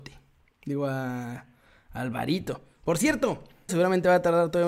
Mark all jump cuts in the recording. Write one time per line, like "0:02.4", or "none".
0:03.7